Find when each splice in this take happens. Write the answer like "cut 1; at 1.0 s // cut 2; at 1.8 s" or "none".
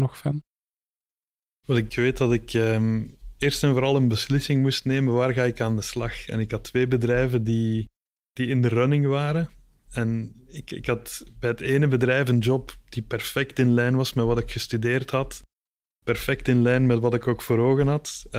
cut 1; at 1.9 s